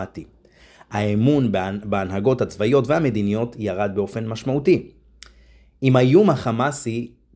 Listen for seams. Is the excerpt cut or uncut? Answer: uncut